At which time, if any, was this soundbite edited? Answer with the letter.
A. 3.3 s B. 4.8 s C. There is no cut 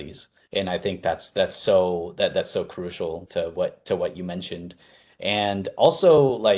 A